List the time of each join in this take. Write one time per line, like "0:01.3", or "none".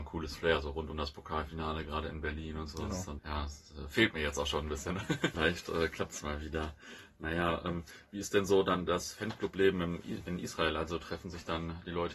0:03.2
0:05.3